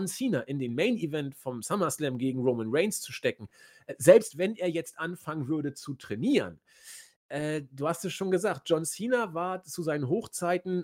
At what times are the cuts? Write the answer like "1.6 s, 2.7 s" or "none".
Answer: none